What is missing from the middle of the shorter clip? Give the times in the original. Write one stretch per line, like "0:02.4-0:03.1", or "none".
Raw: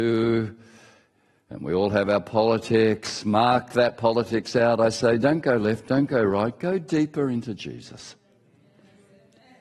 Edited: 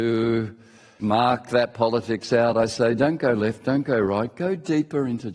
0:01.0-0:03.2